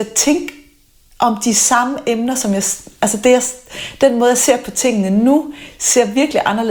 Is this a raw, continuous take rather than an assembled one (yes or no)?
yes